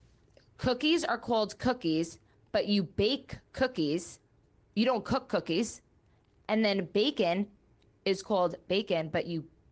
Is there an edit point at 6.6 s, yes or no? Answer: no